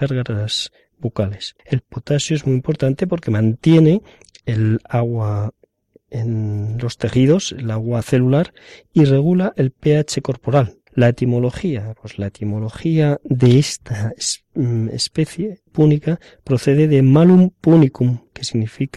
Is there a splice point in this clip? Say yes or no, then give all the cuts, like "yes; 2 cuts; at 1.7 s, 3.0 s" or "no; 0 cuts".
yes; 3 cuts; at 1.6 s, 10.9 s, 15.7 s